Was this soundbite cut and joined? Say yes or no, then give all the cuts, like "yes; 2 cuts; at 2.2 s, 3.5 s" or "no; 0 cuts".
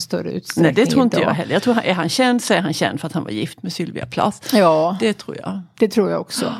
no; 0 cuts